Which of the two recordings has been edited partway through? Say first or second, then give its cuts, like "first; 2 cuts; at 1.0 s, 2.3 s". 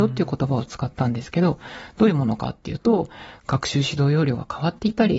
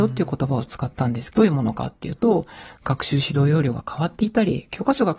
second; 1 cut; at 1.3 s